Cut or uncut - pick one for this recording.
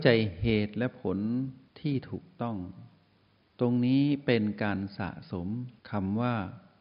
cut